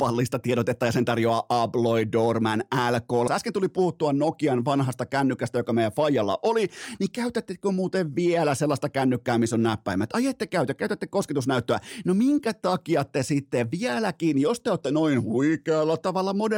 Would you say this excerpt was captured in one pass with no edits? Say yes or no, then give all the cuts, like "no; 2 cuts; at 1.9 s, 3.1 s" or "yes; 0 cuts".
no; 1 cut; at 3.3 s